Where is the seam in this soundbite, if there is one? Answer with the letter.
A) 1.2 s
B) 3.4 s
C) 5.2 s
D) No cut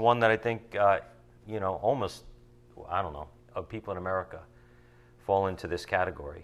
B